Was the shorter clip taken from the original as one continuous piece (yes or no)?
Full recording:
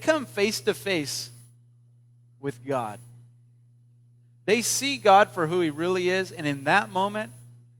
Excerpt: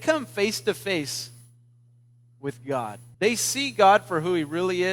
no